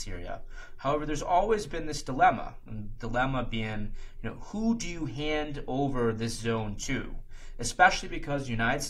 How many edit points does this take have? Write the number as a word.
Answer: zero